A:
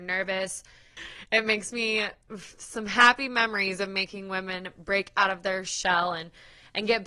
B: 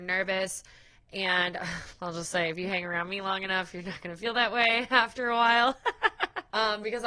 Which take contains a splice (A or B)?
A